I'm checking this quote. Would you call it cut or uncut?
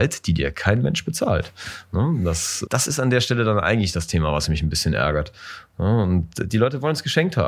cut